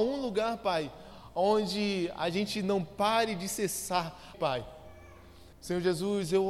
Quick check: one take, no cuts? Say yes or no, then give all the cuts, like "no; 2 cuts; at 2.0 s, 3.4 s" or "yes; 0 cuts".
no; 2 cuts; at 4.3 s, 5.5 s